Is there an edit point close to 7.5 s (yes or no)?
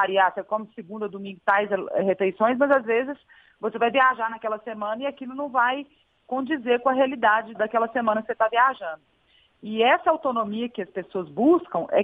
yes